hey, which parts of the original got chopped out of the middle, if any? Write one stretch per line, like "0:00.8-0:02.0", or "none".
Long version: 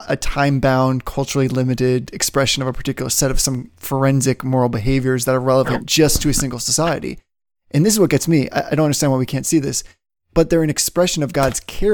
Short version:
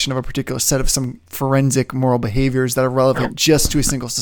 none

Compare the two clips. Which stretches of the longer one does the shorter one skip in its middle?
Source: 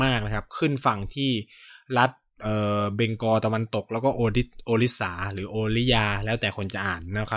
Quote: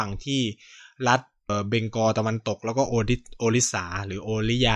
0:02.4-0:02.8

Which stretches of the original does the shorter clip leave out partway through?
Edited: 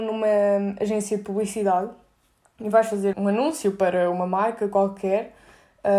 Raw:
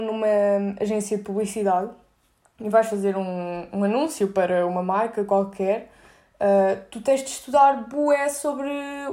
0:03.1-0:03.7

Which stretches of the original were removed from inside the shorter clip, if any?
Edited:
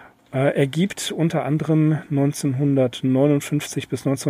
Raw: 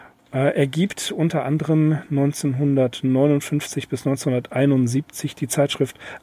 none

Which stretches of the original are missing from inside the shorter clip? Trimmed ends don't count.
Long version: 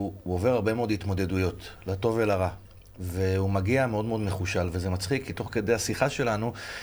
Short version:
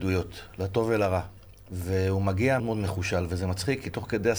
0:03.9-0:04.0

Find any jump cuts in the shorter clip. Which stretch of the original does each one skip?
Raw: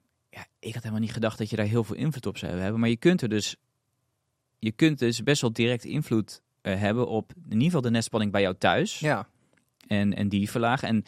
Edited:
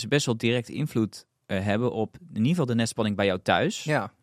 none

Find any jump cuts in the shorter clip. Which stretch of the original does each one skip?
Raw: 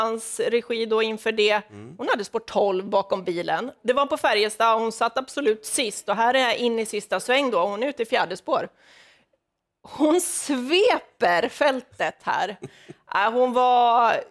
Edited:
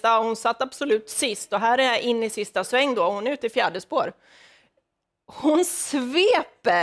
none

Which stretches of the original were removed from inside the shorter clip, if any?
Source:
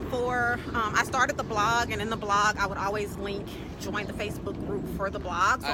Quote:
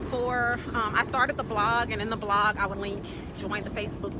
0:02.7-0:03.2

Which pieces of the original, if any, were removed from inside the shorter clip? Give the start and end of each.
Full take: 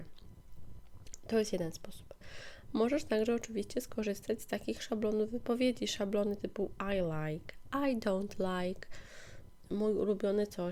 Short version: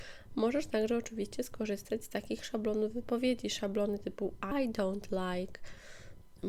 0:06.9-0:07.8

